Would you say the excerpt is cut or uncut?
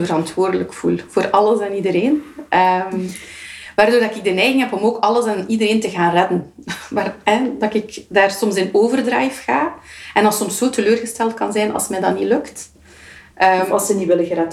uncut